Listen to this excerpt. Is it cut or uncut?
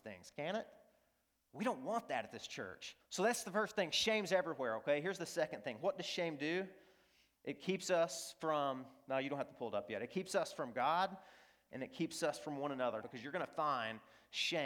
cut